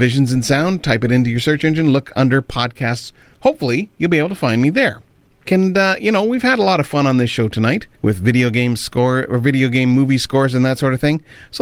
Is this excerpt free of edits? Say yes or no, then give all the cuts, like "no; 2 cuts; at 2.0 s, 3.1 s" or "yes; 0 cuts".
no; 2 cuts; at 5.4 s, 7.9 s